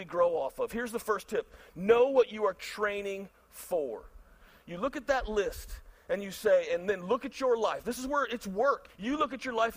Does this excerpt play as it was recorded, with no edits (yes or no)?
no